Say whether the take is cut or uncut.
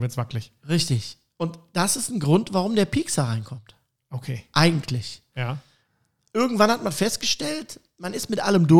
uncut